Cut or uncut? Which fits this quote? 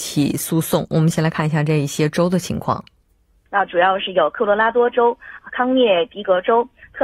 cut